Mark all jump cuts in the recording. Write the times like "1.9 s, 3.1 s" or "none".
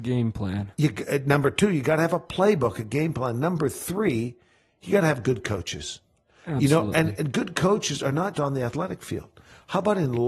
8.3 s